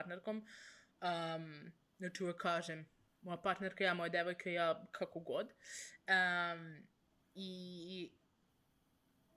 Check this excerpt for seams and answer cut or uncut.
uncut